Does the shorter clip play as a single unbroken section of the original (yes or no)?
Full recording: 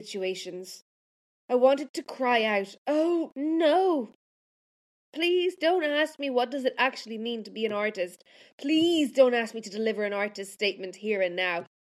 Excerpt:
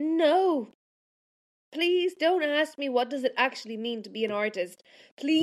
yes